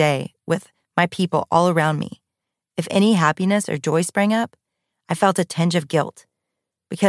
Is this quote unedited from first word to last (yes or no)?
yes